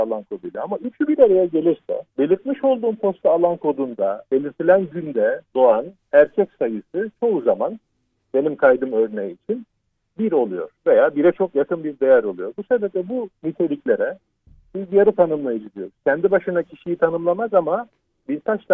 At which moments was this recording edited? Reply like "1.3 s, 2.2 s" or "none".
2.1 s

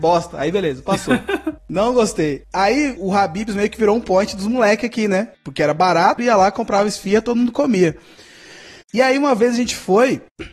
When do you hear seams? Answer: 3.0 s, 6.2 s

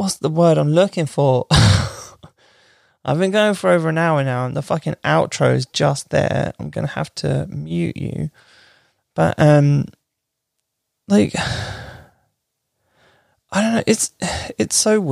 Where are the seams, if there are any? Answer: none

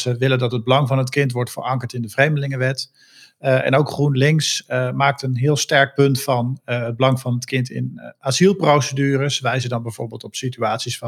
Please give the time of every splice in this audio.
none

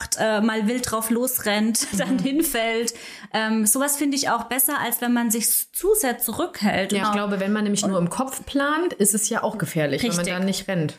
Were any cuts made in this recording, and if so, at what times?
7.0 s

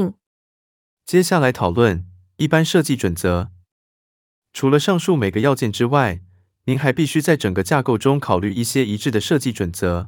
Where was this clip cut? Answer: none

